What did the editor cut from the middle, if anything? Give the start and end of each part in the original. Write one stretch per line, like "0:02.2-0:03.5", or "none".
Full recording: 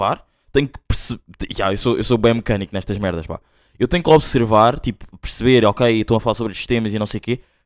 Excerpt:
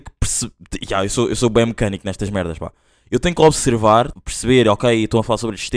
0:04.8-0:05.1